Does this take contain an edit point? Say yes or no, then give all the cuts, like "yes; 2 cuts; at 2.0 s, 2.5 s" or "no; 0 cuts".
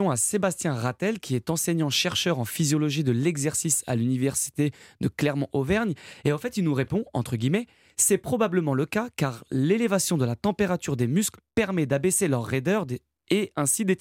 no; 0 cuts